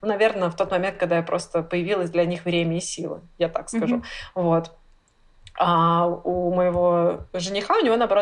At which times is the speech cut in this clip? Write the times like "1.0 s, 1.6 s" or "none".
none